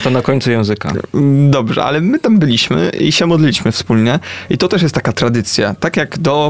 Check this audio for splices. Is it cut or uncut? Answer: uncut